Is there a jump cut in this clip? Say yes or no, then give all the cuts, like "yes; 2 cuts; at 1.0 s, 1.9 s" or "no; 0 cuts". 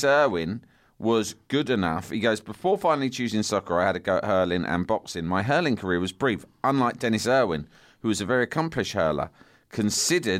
no; 0 cuts